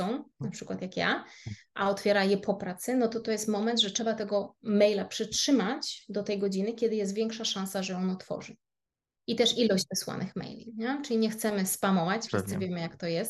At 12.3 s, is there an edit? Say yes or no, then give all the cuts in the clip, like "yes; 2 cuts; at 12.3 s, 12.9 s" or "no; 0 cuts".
yes; 1 cut; at 12.3 s